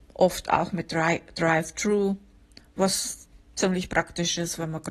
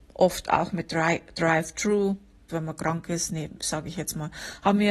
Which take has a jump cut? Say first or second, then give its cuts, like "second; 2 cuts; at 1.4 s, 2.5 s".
second; 1 cut; at 2.5 s